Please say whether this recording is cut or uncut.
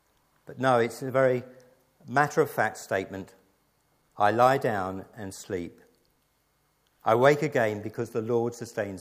uncut